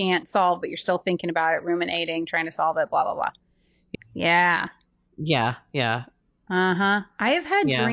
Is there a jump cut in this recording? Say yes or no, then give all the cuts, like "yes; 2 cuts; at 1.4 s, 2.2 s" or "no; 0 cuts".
yes; 1 cut; at 3.9 s